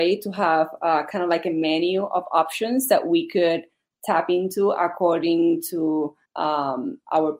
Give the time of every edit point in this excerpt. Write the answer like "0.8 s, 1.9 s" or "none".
6.3 s